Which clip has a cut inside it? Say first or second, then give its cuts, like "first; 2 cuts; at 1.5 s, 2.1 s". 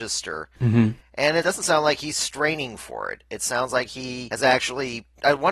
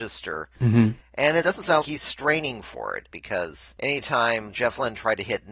second; 2 cuts; at 1.8 s, 3.1 s